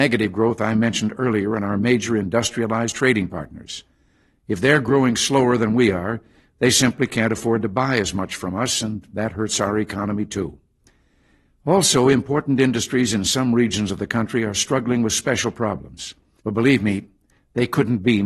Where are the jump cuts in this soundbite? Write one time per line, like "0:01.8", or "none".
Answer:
0:16.4